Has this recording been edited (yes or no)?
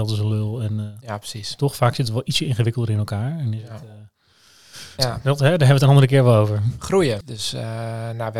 yes